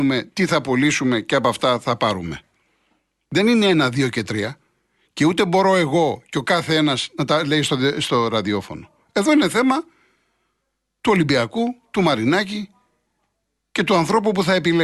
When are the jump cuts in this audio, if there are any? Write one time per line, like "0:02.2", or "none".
none

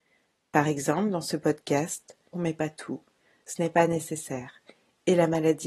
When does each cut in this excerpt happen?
0:02.3

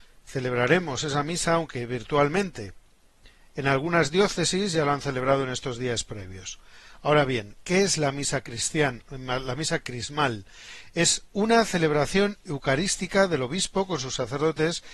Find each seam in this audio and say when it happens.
none

